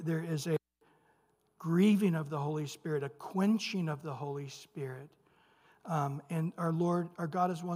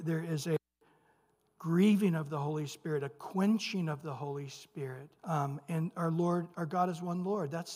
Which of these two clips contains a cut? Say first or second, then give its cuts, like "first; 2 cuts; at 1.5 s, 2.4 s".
second; 1 cut; at 5.2 s